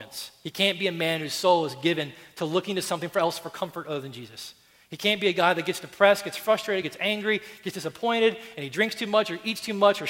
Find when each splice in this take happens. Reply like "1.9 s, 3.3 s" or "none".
none